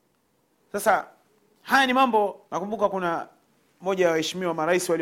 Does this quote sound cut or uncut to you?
cut